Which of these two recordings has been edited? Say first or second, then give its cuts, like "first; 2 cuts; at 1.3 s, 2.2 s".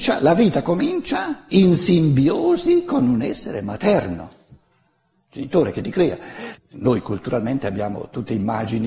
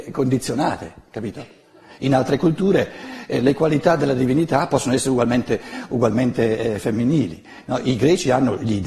first; 1 cut; at 6.6 s